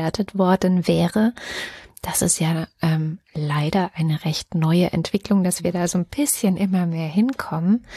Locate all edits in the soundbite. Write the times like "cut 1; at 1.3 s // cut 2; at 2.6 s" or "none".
none

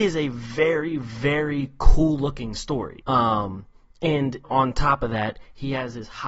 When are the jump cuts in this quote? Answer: cut 1; at 3.0 s // cut 2; at 4.4 s

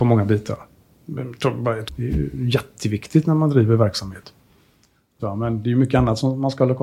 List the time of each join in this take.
cut 1; at 1.9 s // cut 2; at 5.2 s

